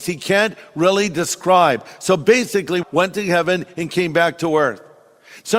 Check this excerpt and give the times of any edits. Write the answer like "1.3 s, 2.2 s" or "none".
2.8 s